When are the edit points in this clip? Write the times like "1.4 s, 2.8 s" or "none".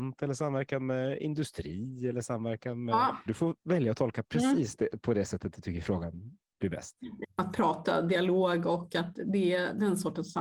3.3 s, 7.2 s

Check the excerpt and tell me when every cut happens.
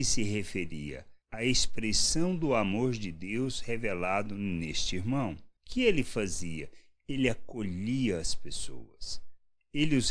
none

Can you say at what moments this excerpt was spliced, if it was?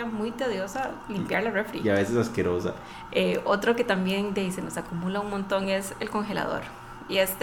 3.1 s

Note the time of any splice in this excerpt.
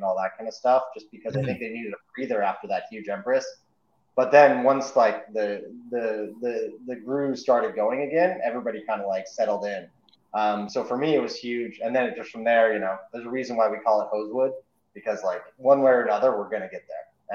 none

